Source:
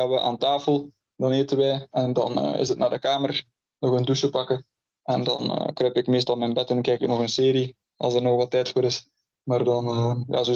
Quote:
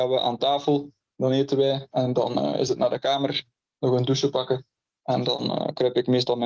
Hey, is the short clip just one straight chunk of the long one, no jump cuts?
yes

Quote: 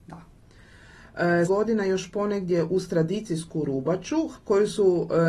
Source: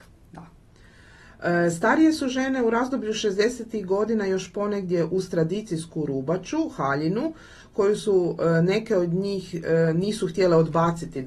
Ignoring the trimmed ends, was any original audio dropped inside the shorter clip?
yes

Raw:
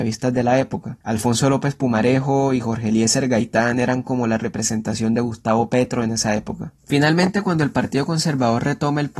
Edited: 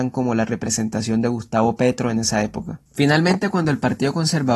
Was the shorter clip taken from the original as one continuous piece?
yes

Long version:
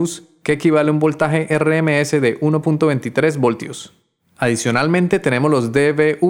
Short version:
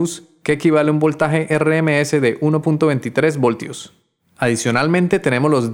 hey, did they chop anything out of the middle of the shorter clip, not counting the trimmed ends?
no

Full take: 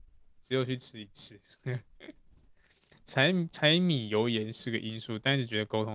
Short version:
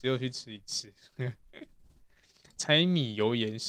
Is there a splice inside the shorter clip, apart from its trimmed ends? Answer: yes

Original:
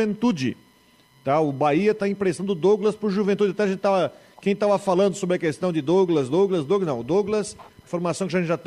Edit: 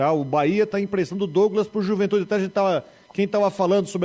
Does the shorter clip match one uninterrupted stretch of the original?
yes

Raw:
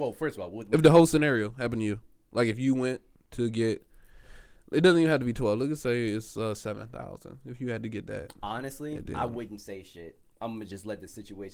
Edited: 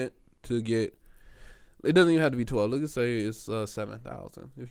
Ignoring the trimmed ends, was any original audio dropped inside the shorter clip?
no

